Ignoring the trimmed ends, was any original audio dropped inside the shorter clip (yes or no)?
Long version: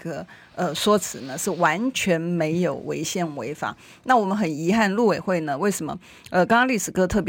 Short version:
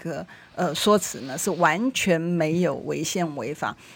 no